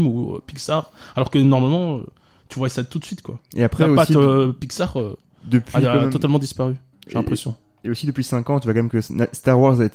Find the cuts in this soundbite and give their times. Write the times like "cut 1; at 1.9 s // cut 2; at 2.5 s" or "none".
none